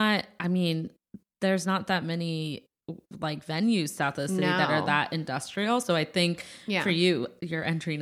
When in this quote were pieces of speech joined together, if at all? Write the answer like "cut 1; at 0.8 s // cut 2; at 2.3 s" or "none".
none

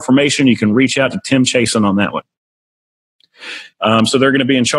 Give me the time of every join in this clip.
cut 1; at 3.7 s

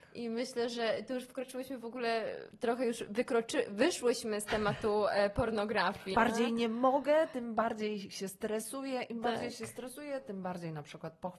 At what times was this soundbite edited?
cut 1; at 6.1 s

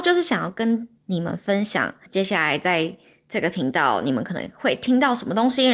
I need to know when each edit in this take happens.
none

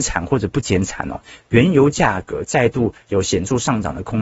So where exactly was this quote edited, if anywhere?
none

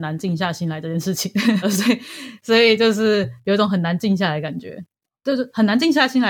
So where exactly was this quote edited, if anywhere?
cut 1; at 1.6 s

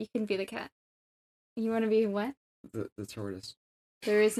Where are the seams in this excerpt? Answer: none

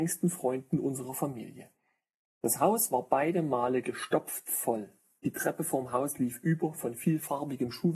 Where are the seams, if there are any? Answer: none

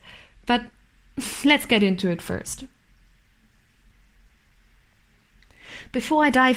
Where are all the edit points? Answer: none

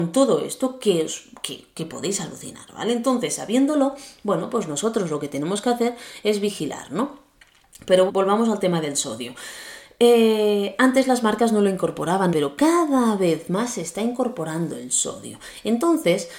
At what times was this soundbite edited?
cut 1; at 8.1 s // cut 2; at 12.3 s

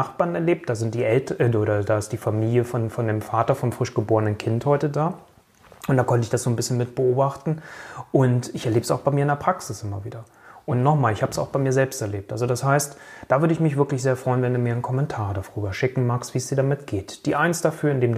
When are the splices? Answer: none

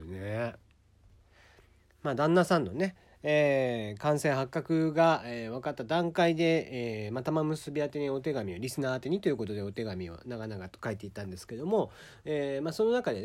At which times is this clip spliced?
none

